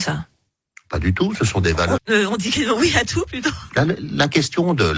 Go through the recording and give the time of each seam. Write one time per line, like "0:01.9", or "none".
0:02.0
0:03.7